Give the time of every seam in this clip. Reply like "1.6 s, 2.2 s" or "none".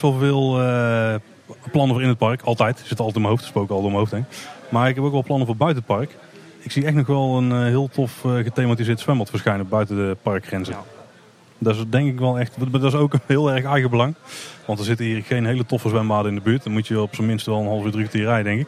none